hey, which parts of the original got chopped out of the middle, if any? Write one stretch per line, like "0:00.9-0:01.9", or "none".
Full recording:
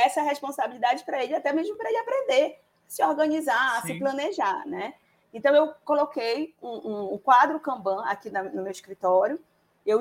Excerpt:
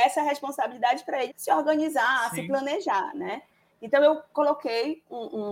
0:01.3-0:02.8